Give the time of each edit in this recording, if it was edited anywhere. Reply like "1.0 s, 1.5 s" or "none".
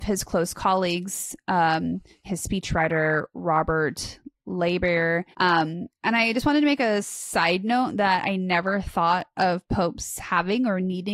2.2 s, 5.3 s